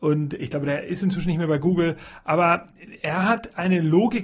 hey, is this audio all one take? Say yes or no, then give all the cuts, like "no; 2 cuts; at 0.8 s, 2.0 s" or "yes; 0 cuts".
yes; 0 cuts